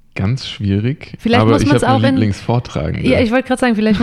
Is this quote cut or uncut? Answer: uncut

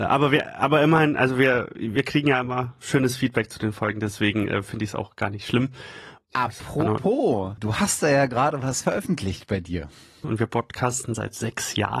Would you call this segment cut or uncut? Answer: cut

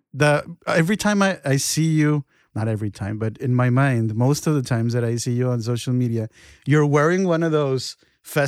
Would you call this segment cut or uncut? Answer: uncut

